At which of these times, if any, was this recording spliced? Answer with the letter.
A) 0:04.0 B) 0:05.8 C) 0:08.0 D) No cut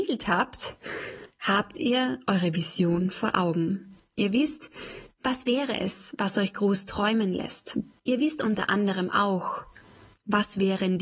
C